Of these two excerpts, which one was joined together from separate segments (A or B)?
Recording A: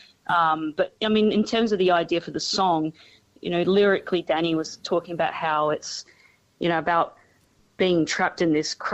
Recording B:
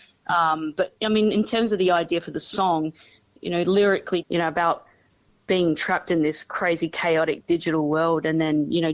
B